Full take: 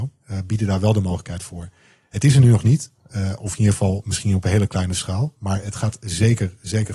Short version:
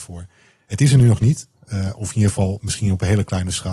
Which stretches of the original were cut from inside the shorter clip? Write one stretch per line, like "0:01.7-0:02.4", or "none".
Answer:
none